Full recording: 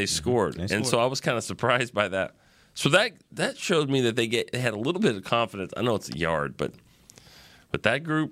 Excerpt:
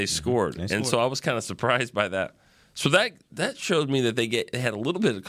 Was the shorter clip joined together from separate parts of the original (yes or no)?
no